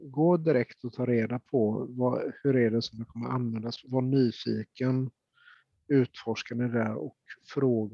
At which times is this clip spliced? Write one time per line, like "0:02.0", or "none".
0:03.8
0:05.8